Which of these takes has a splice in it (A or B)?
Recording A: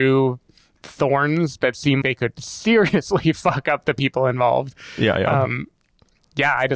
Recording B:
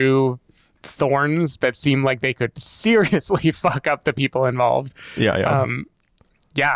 A